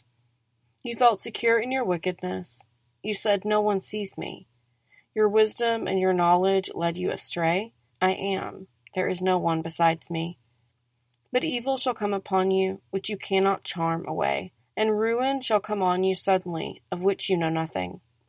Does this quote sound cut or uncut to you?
cut